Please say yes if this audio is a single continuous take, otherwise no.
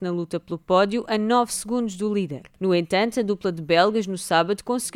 yes